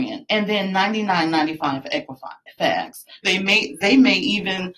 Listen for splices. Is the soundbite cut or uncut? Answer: cut